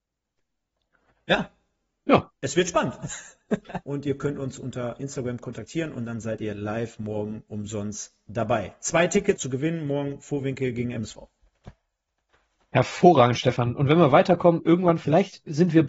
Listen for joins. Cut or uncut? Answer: cut